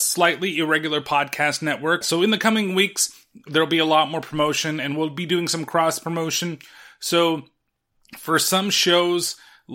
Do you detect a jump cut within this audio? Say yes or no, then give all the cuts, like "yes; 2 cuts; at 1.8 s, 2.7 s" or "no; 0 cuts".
yes; 1 cut; at 2.0 s